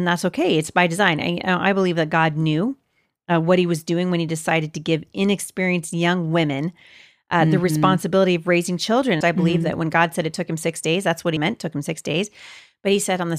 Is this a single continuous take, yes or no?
no